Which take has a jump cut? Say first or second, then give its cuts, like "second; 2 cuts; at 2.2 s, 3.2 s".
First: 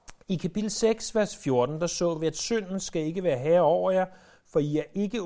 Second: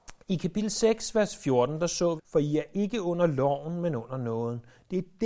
second; 1 cut; at 2.2 s